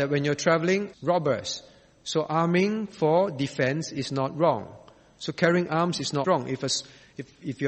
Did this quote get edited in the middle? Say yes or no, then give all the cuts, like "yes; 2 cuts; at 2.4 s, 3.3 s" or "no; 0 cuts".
yes; 2 cuts; at 0.9 s, 6.2 s